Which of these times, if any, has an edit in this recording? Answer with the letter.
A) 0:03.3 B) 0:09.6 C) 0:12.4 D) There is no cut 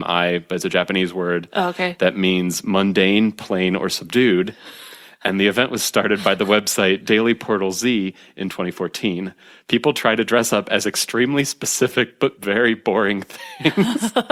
D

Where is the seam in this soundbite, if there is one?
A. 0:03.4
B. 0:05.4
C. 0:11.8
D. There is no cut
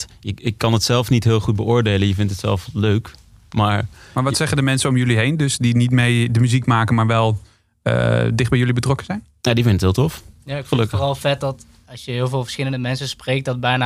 C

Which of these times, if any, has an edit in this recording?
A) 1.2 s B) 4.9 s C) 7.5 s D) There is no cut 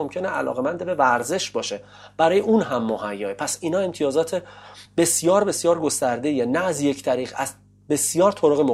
D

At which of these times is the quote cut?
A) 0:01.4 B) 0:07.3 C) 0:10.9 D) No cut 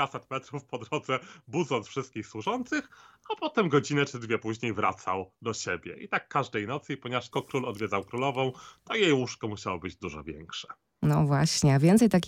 B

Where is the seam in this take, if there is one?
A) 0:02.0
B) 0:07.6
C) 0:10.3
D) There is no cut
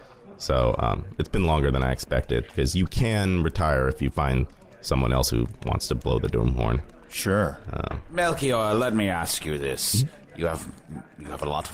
D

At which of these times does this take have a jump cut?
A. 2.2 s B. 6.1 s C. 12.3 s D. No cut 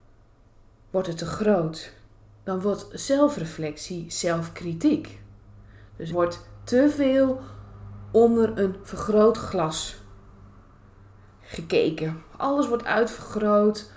B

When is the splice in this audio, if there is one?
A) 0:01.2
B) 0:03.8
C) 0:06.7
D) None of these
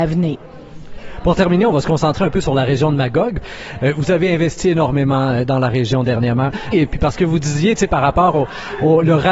C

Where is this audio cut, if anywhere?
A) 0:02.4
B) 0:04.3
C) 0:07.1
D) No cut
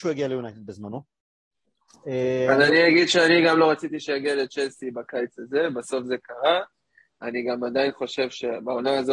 D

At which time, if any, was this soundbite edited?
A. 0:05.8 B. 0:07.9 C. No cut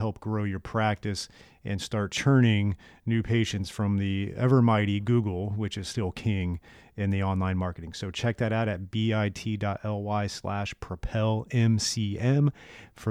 C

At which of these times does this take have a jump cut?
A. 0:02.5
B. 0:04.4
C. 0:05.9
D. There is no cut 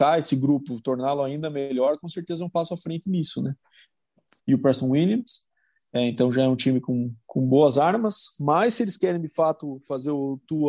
B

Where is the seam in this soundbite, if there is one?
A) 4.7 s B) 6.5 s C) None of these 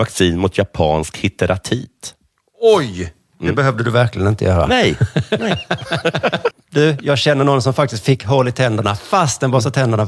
B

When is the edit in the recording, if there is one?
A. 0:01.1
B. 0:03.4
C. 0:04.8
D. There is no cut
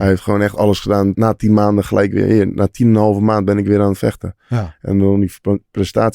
A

